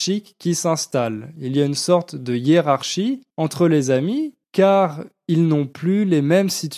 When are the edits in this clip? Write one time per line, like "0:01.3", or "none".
0:03.3
0:04.4